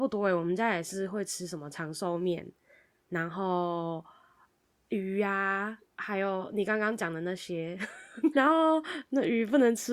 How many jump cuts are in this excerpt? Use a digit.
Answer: 2